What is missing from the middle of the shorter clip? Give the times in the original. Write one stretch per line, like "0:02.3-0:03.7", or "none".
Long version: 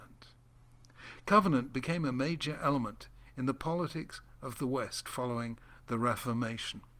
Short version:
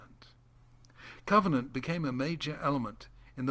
none